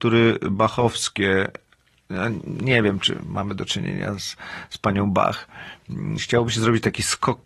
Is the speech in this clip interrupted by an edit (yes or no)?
yes